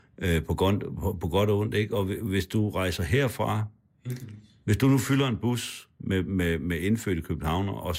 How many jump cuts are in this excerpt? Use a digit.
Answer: 0